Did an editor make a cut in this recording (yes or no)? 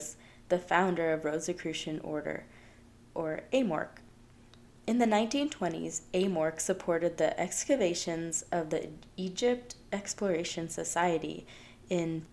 no